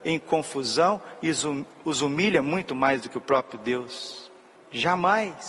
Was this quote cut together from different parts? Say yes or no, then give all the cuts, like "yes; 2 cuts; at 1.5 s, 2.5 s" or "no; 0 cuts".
yes; 1 cut; at 4.5 s